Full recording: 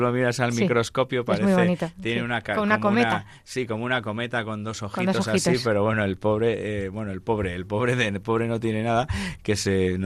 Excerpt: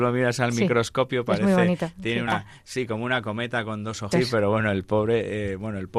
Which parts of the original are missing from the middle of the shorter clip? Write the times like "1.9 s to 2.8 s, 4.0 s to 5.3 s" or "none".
2.3 s to 3.1 s, 4.9 s to 5.4 s